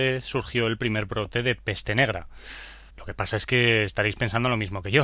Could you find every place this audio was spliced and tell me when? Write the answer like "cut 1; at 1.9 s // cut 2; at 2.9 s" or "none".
cut 1; at 2.9 s

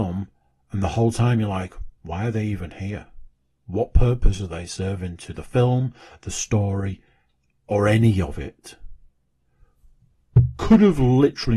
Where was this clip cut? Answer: none

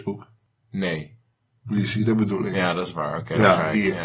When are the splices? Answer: none

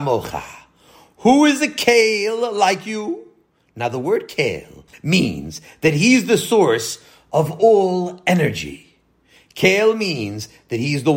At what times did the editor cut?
cut 1; at 4.9 s

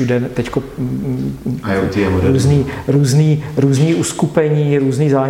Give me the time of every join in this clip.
none

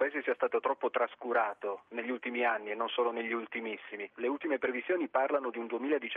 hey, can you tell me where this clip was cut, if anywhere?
cut 1; at 4.1 s

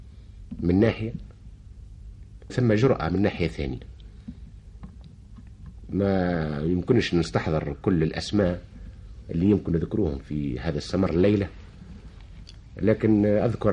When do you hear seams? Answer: cut 1; at 2.5 s

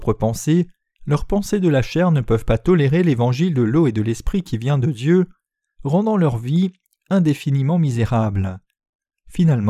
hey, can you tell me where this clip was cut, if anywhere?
cut 1; at 1.0 s

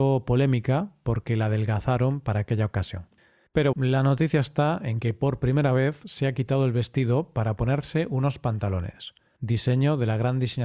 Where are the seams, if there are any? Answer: cut 1; at 3.7 s // cut 2; at 9.4 s

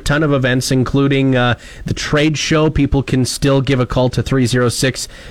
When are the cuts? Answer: none

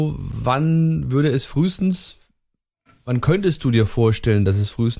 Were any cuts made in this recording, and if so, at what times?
none

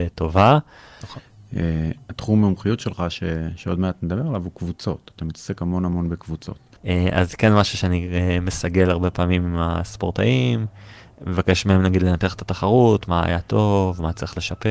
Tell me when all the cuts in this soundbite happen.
cut 1; at 1.0 s // cut 2; at 6.8 s

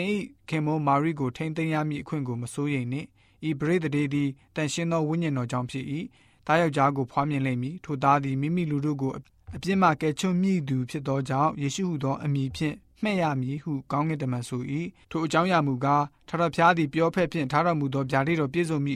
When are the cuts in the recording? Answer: cut 1; at 15.0 s

